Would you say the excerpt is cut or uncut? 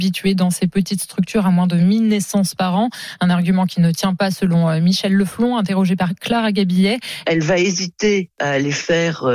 cut